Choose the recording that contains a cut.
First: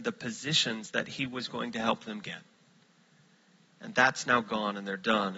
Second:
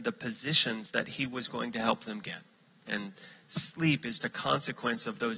second; 2 cuts; at 2.9 s, 4.2 s

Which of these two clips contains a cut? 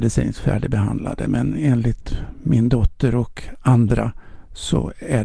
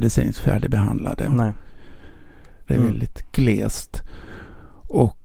second; 2 cuts; at 1.3 s, 2.7 s

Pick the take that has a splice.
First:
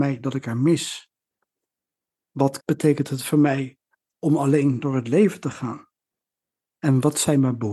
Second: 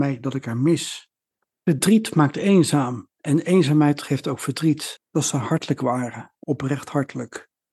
second; 2 cuts; at 1.5 s, 5.0 s

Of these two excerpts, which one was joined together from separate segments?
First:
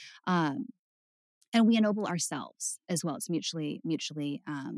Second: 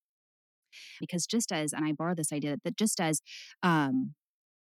second; 1 cut; at 1.0 s

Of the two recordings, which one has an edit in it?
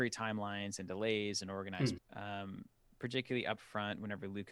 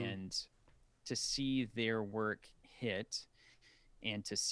first; 1 cut; at 2.0 s

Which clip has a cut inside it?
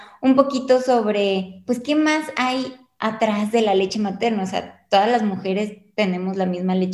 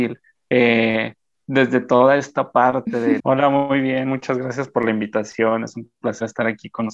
second; 1 cut; at 3.2 s

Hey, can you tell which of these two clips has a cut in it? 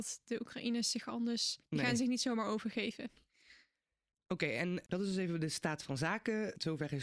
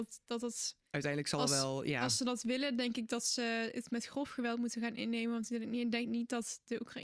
first; 1 cut; at 3.2 s

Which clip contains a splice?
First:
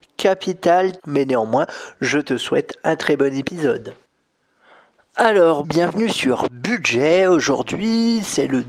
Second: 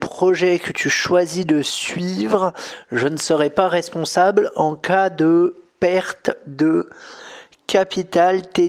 first; 2 cuts; at 1.0 s, 5.6 s

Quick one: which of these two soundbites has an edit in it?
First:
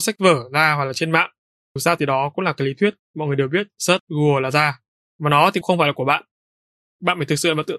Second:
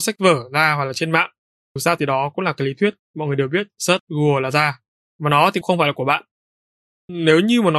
first; 1 cut; at 6.8 s

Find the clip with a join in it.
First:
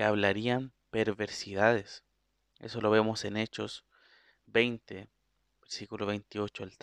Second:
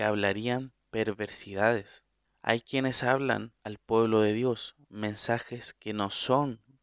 second; 2 cuts; at 2.2 s, 3.6 s

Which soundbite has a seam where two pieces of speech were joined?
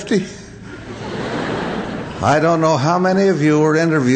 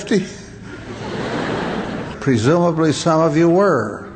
second; 1 cut; at 2.1 s

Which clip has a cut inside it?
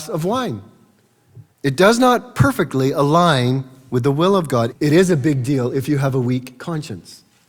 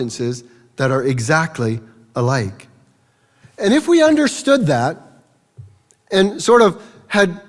first; 2 cuts; at 1.5 s, 4.7 s

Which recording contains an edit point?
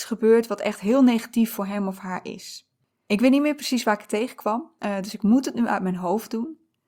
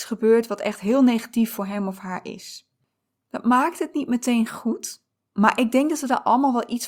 first; 1 cut; at 2.9 s

